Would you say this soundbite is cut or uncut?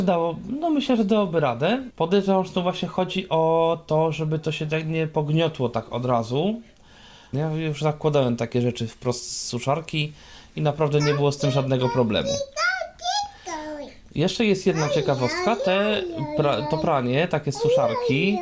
cut